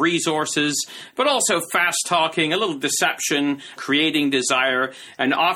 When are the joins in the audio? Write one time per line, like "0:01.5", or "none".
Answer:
0:03.8